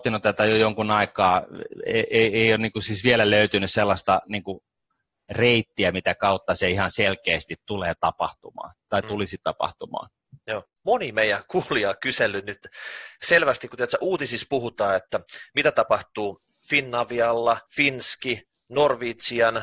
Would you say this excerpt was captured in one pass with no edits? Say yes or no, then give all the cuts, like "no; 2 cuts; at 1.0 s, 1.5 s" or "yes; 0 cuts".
no; 2 cuts; at 10.8 s, 17.7 s